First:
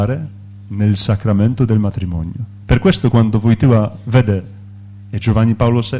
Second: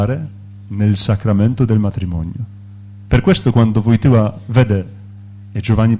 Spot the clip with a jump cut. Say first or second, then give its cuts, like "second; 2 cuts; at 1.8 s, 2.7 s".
first; 1 cut; at 2.6 s